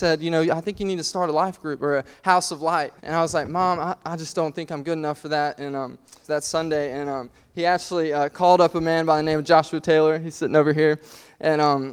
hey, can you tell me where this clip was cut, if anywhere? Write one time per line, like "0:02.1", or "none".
0:03.0
0:06.2